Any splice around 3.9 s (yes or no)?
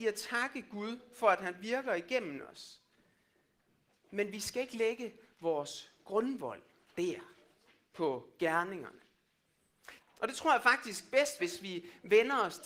no